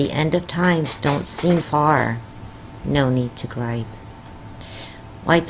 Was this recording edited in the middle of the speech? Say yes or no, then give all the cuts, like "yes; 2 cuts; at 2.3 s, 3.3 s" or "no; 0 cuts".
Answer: yes; 2 cuts; at 1.6 s, 2.8 s